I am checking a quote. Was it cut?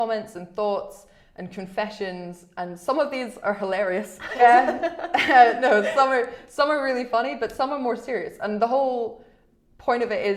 yes; 1 cut; at 4.4 s

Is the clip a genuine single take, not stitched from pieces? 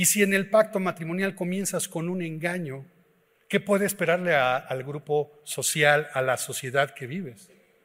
yes; 0 cuts

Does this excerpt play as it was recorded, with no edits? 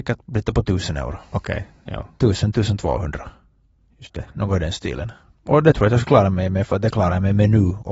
yes; 0 cuts

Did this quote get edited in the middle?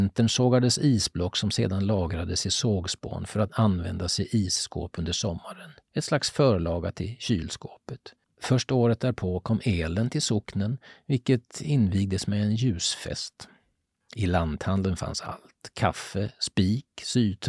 no; 0 cuts

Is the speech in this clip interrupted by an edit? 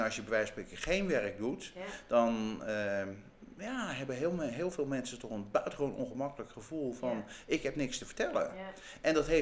no; 0 cuts

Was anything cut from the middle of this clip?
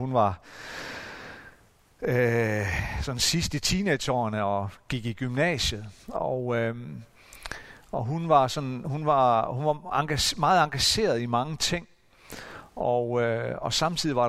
no; 0 cuts

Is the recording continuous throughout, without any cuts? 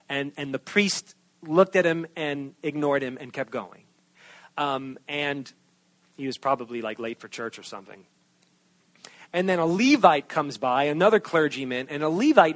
yes; 0 cuts

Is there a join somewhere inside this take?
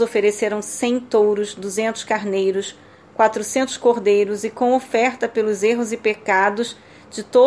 no; 0 cuts

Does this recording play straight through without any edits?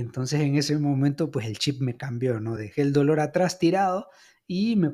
yes; 0 cuts

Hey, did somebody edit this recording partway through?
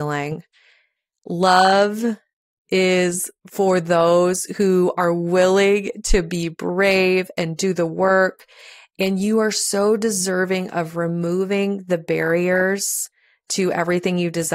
no; 0 cuts

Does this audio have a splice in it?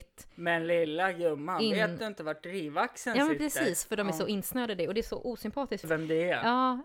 yes; 1 cut; at 5.8 s

